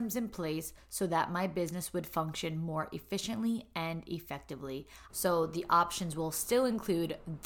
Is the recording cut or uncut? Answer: cut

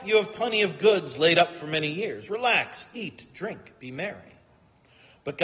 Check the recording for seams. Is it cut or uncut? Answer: uncut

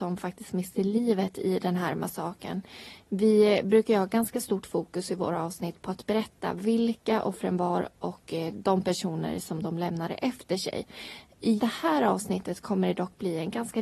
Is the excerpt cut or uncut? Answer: cut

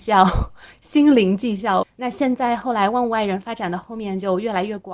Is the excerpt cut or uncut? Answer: cut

